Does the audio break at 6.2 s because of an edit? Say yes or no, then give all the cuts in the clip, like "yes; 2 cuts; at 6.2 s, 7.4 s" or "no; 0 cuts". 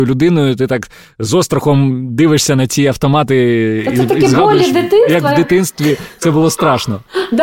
no; 0 cuts